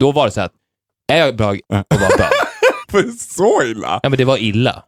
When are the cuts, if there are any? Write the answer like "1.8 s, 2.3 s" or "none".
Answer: 1.6 s, 2.8 s